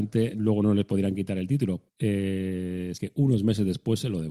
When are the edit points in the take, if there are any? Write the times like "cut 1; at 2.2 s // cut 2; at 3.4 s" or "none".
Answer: cut 1; at 1.9 s // cut 2; at 2.9 s

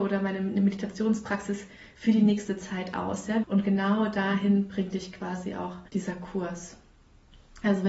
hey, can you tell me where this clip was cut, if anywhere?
cut 1; at 3.4 s // cut 2; at 5.9 s

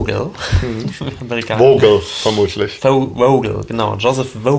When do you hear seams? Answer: none

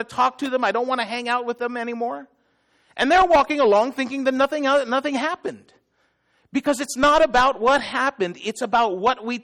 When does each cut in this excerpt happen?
none

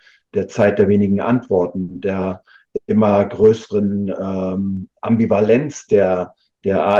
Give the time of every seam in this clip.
none

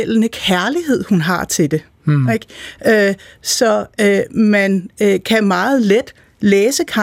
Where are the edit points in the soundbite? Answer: none

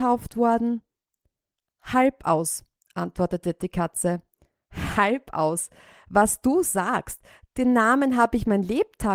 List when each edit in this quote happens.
none

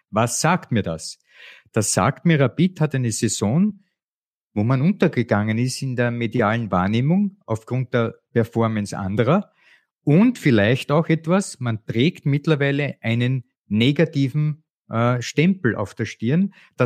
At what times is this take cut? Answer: none

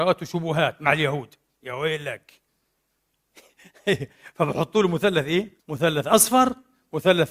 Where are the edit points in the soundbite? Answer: cut 1; at 5.6 s

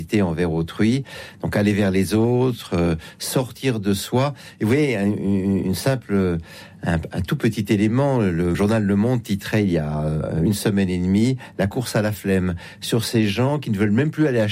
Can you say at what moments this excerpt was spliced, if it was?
cut 1; at 8.5 s

